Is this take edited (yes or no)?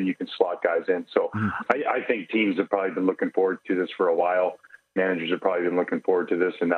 no